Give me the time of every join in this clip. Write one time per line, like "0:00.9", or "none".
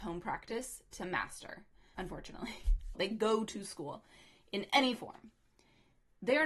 0:01.9
0:02.9